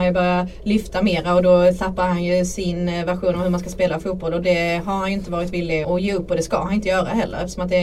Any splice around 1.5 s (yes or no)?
no